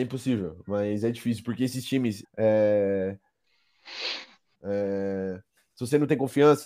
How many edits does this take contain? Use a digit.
2